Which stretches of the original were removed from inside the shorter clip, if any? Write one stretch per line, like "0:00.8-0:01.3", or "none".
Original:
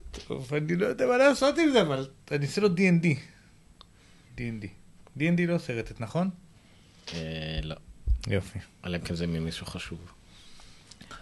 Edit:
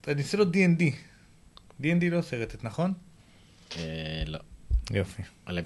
0:03.9-0:05.0